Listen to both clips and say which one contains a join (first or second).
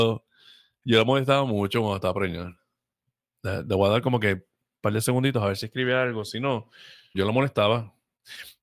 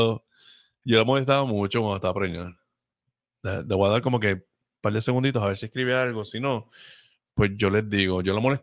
first